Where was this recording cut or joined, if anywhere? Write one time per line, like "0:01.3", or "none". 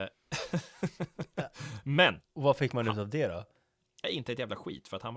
0:02.3